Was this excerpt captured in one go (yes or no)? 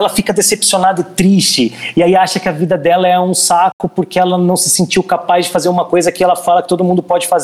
yes